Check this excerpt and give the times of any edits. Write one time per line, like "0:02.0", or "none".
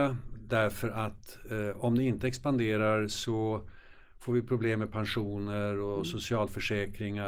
none